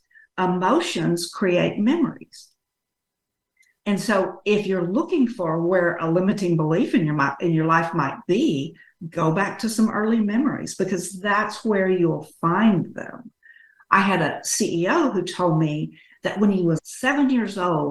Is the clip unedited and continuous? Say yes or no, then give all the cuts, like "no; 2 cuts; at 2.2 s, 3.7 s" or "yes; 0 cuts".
no; 1 cut; at 16.8 s